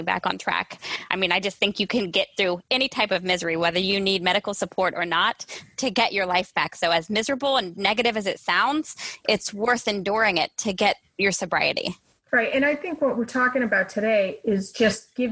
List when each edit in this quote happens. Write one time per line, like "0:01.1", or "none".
none